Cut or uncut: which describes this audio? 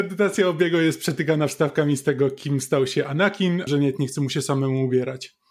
cut